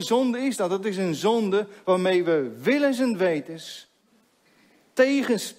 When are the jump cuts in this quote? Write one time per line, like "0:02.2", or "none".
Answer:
none

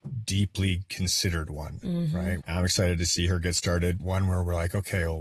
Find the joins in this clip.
0:02.4
0:04.0

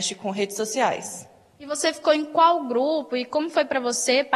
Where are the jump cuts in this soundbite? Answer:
none

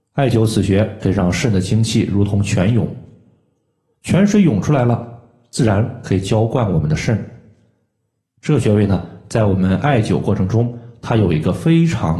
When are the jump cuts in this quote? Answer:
none

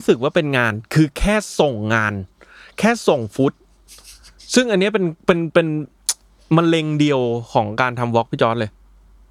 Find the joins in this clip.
none

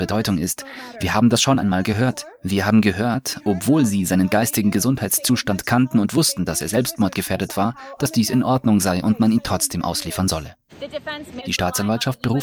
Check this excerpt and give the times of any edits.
0:11.4

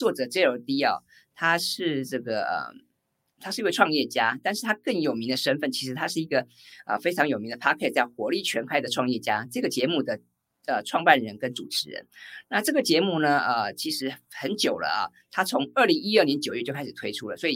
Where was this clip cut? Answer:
none

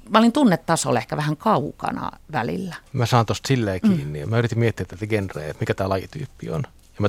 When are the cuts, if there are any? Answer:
0:02.9

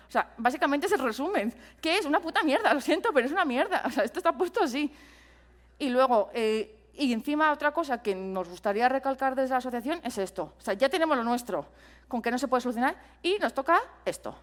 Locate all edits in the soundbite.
none

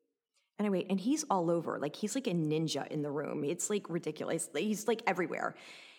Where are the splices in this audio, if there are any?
none

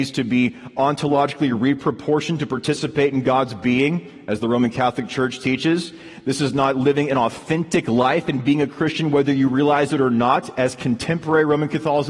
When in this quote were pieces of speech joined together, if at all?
none

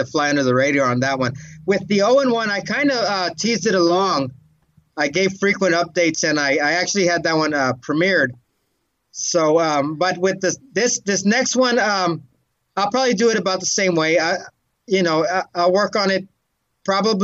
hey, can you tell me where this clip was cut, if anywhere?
none

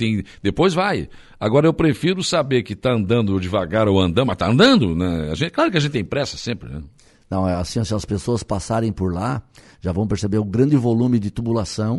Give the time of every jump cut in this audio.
none

